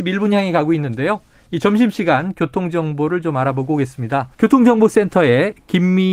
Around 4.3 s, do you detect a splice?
yes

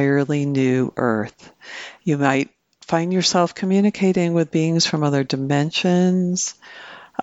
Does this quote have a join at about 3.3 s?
no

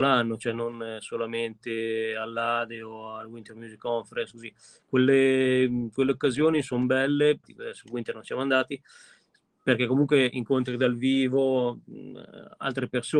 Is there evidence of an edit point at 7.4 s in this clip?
yes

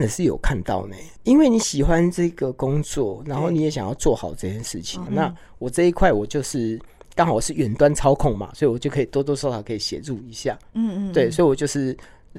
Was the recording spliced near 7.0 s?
no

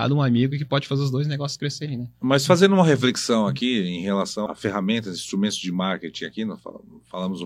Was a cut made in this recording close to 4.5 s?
yes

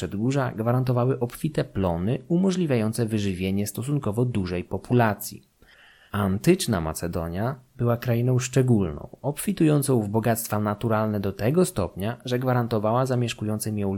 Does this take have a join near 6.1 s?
yes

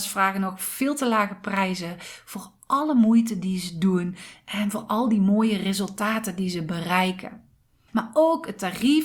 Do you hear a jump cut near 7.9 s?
yes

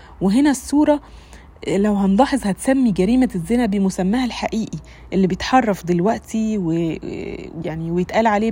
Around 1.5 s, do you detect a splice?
no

